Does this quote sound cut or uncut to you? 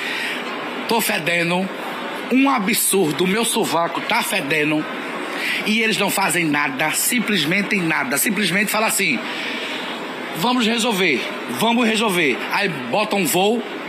uncut